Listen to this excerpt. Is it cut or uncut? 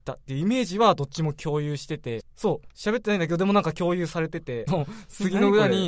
cut